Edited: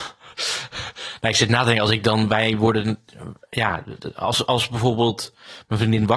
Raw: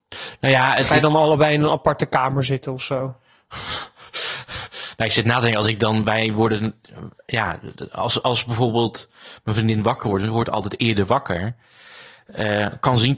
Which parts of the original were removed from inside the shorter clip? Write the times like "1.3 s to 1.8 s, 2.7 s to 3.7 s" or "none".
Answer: none